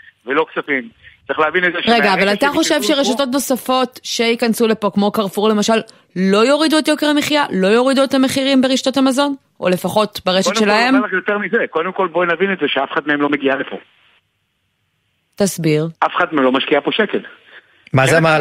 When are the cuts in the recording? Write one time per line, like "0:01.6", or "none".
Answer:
0:16.0